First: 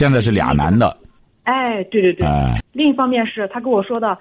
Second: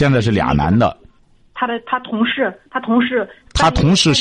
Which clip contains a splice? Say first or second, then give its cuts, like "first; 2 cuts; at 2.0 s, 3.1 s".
first; 2 cuts; at 1.3 s, 2.6 s